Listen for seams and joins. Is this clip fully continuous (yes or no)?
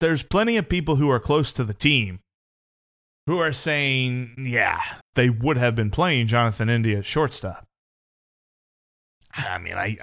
no